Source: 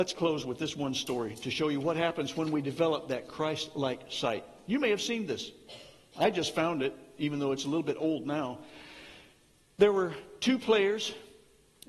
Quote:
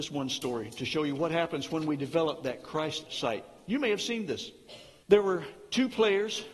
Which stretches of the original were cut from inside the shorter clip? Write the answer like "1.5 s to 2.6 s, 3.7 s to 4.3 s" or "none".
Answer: 3.7 s to 4.1 s, 6.0 s to 9.7 s

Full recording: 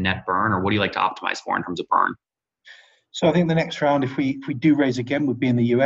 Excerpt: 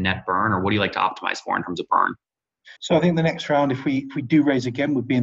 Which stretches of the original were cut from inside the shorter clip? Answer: 2.8 s to 3.1 s

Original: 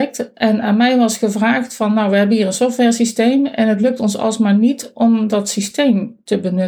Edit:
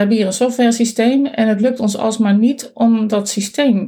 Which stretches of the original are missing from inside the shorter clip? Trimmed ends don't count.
none

